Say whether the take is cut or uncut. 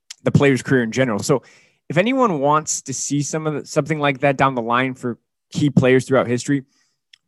uncut